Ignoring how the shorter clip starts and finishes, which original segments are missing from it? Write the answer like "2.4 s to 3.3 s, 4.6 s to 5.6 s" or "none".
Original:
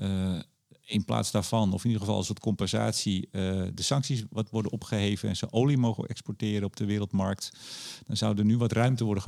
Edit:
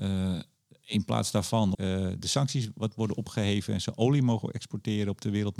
1.7 s to 3.3 s